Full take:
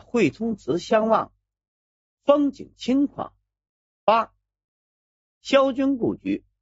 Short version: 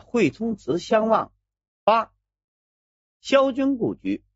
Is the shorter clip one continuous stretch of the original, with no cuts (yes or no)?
no